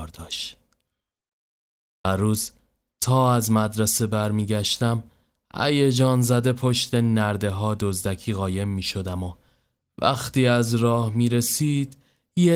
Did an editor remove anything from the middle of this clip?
no; 0 cuts

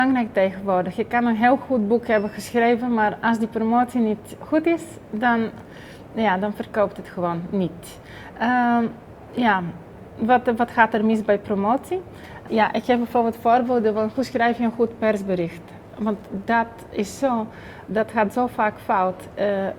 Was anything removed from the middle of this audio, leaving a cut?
yes; 1 cut; at 12.5 s

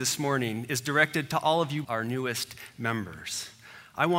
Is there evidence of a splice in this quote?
yes; 1 cut; at 1.8 s

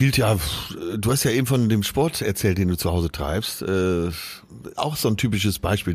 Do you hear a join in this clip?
no; 0 cuts

